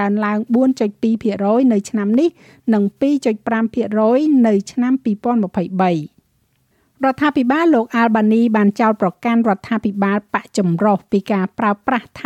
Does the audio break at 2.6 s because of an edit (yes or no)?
no